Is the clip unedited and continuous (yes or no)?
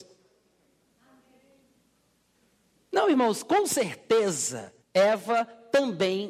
no